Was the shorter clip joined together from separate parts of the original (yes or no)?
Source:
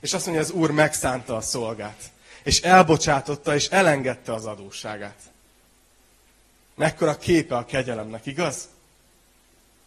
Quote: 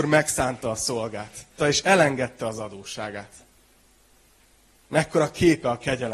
yes